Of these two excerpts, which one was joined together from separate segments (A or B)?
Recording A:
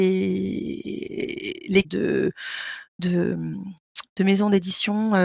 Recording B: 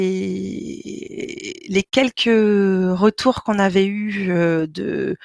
A